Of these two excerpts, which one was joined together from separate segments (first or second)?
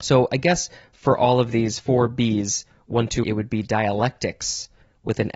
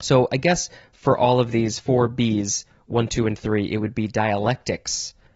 first